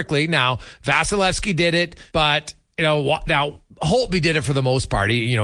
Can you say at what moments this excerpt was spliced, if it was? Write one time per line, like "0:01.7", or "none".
0:02.1